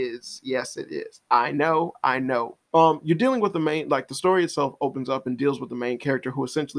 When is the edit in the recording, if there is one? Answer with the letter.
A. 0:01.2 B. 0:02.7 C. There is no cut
B